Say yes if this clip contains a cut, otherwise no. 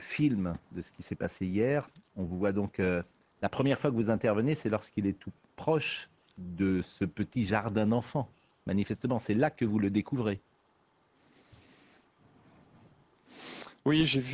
no